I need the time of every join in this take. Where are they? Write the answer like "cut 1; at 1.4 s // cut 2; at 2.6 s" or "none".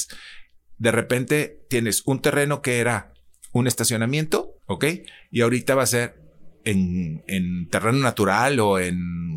cut 1; at 4.6 s